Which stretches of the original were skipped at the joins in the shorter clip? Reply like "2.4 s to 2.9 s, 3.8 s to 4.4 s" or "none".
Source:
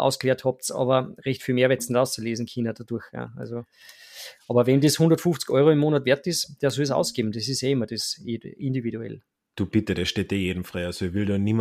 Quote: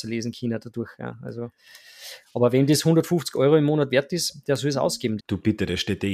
7.3 s to 9.5 s